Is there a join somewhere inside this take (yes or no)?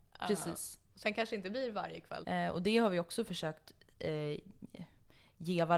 yes